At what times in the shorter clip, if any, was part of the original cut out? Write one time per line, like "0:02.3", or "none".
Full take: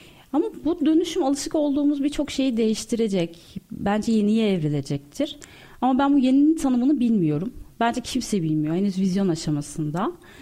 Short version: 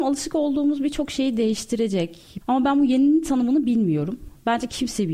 0:02.4